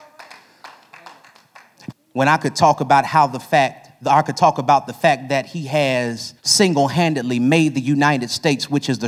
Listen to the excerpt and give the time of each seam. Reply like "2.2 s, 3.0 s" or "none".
1.9 s, 6.4 s

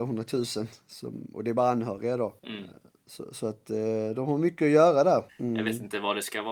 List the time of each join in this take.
2.4 s, 5.3 s

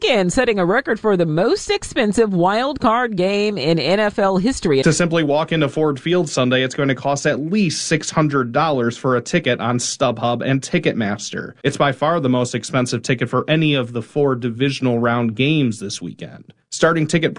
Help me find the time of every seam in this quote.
4.8 s, 11.6 s

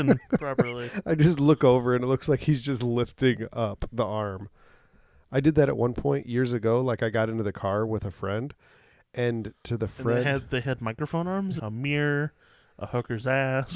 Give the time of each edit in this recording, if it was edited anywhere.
11.6 s

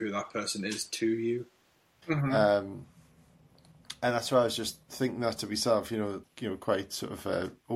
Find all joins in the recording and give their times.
2.0 s, 6.2 s

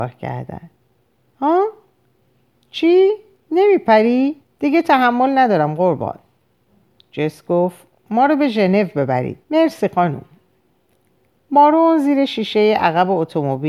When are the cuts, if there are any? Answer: 4.4 s, 9.4 s

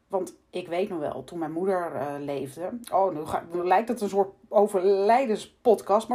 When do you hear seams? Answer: none

